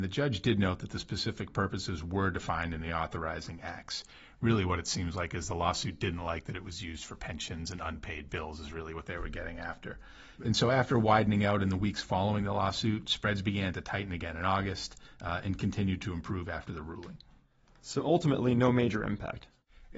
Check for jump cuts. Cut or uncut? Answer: uncut